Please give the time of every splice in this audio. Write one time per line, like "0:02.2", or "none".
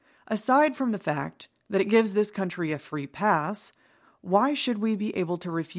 none